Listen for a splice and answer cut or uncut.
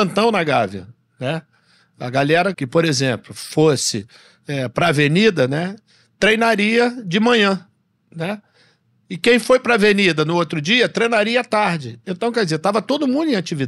cut